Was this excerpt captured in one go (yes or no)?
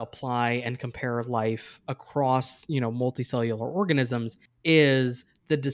yes